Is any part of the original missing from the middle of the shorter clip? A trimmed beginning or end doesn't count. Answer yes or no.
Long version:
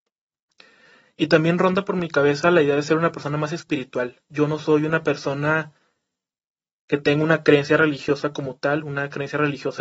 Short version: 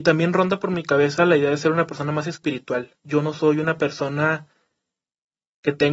no